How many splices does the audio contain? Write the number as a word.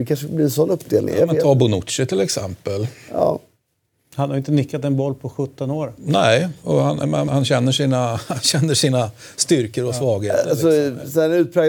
one